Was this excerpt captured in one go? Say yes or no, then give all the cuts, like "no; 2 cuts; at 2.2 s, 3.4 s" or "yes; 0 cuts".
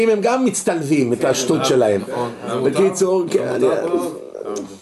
yes; 0 cuts